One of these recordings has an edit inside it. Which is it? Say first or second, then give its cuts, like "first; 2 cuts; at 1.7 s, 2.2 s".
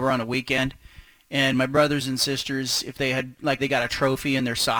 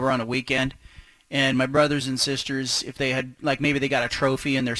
first; 1 cut; at 3.6 s